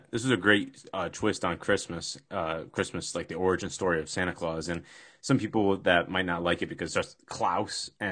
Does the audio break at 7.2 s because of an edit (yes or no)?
yes